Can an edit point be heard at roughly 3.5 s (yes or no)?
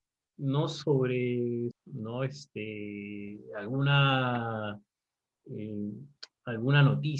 no